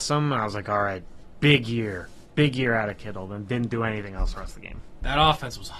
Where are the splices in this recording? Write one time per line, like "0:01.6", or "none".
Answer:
none